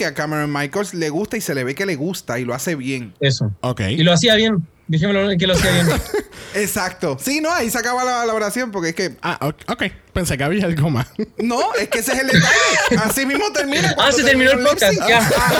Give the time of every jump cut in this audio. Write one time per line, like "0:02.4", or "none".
none